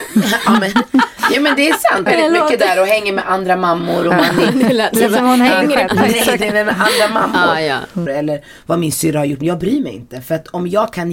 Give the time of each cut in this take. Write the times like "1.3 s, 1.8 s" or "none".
2.1 s, 5.9 s, 8.1 s

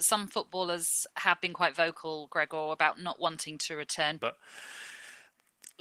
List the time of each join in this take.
4.2 s

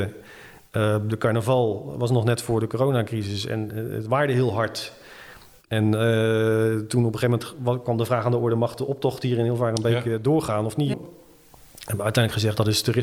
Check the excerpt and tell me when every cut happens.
10.9 s

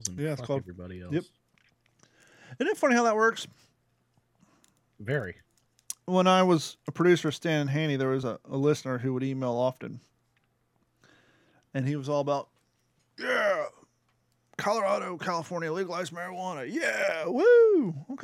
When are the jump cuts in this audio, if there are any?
none

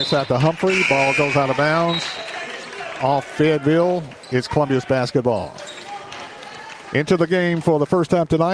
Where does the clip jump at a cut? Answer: none

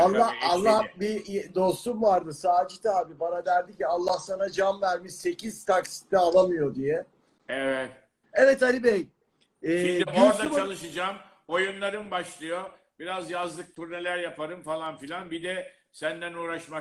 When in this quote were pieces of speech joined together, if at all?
8.2 s

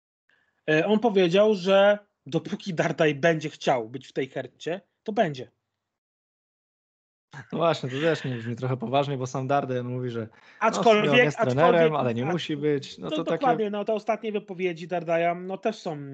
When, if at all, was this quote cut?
13.8 s

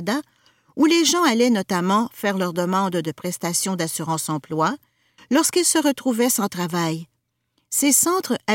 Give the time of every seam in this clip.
5.2 s

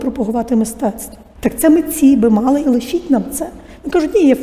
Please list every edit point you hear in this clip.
1.3 s, 2.6 s

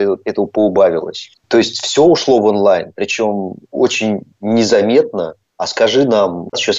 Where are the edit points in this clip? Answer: 1.4 s

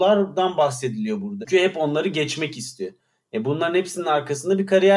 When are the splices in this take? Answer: 1.4 s

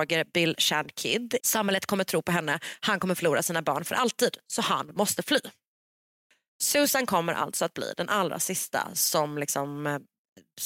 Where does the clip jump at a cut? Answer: 1.4 s

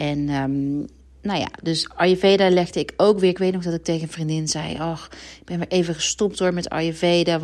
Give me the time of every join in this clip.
none

